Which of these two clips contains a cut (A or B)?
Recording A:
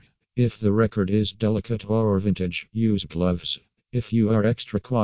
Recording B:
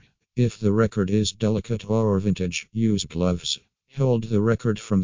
B